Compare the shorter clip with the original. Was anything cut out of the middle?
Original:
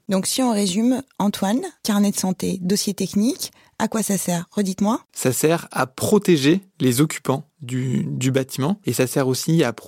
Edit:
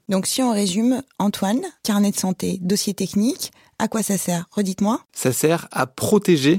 no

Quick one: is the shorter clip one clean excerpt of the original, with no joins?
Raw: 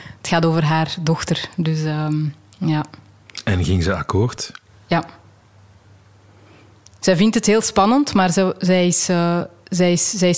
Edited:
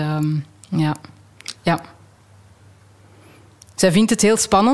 no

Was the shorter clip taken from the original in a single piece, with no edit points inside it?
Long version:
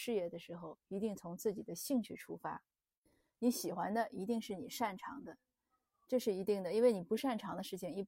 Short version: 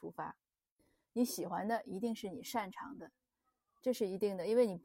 yes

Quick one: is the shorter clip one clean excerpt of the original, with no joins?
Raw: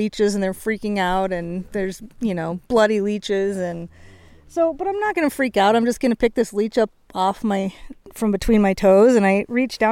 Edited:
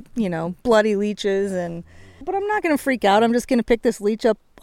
no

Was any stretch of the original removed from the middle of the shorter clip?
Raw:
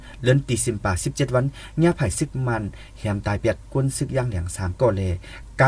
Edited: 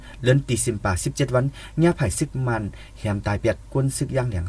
no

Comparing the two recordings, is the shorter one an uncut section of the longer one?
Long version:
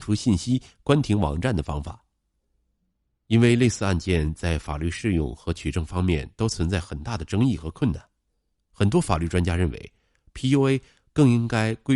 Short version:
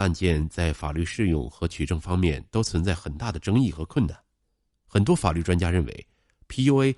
yes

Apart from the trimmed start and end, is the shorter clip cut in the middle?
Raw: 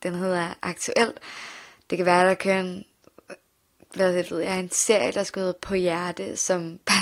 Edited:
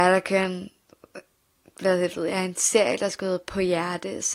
no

